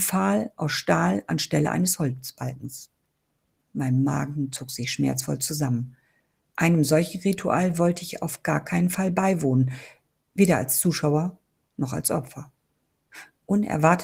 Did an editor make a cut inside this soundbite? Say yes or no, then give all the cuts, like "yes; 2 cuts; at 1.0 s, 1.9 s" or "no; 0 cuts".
no; 0 cuts